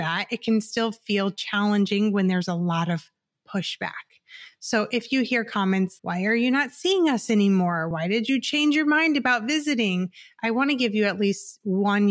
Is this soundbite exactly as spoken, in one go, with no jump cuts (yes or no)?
no